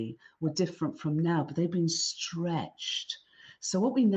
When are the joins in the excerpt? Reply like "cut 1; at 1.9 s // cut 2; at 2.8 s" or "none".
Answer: none